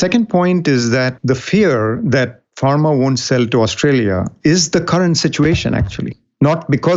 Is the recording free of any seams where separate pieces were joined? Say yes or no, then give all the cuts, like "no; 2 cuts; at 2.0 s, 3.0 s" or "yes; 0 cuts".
yes; 0 cuts